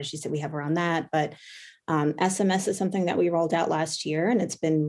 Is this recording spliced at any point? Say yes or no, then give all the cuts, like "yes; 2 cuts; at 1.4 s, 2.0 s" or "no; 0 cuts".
no; 0 cuts